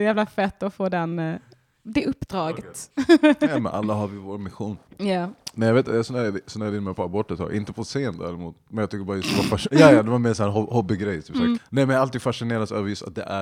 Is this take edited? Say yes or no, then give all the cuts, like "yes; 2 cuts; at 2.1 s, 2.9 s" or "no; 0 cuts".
yes; 2 cuts; at 9.7 s, 11.6 s